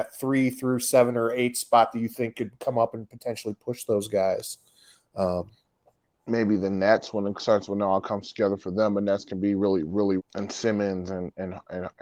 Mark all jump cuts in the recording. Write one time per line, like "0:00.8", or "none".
0:10.2